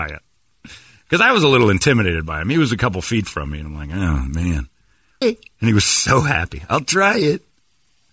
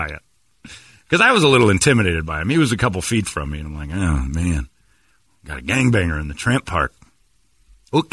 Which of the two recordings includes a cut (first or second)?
first